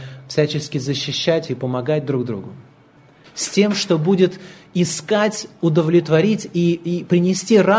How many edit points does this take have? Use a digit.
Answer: 1